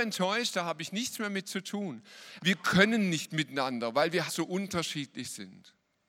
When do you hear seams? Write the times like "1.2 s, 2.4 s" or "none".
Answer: 2.4 s, 4.3 s